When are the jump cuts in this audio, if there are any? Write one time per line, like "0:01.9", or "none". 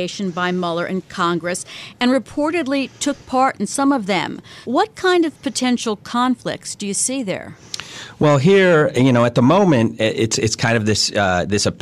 0:04.6